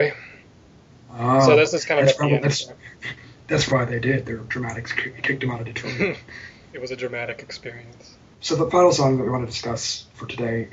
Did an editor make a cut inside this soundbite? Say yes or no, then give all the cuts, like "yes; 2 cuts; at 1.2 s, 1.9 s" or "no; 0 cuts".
yes; 1 cut; at 3.7 s